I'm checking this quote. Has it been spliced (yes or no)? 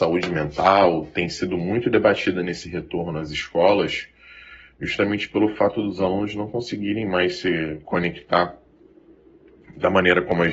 no